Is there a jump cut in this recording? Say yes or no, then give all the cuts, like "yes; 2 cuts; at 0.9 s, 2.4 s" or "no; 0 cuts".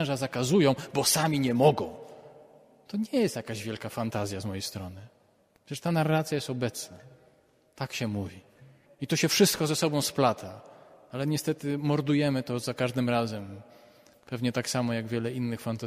yes; 1 cut; at 8.8 s